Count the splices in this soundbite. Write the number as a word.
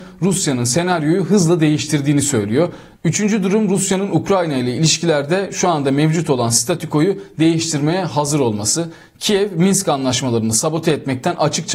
one